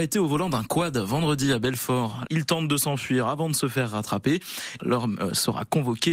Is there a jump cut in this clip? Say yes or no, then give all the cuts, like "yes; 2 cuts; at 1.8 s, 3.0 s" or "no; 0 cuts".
yes; 2 cuts; at 2.3 s, 4.8 s